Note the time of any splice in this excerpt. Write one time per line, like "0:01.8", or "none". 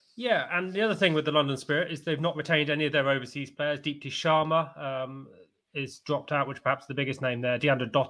none